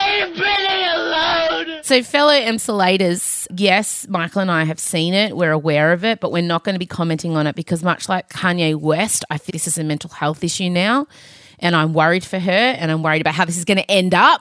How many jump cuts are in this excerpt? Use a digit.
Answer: 2